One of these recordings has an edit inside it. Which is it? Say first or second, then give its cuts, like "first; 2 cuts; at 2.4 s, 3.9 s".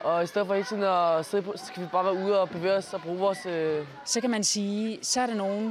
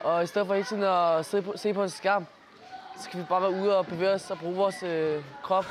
first; 2 cuts; at 1.6 s, 4.0 s